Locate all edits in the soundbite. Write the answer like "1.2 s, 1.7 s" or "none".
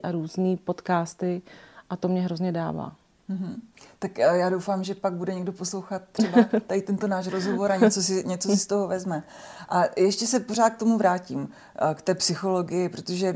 none